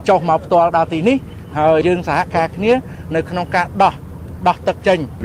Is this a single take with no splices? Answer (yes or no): no